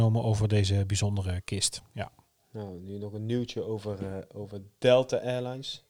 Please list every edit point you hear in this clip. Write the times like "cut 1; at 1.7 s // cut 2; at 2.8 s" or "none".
none